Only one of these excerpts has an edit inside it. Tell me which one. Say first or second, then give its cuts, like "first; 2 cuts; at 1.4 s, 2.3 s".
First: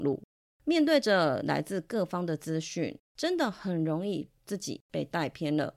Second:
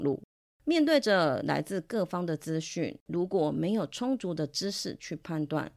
first; 1 cut; at 3.0 s